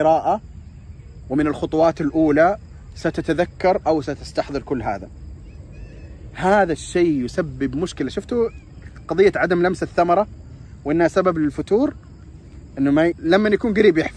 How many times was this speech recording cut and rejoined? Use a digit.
1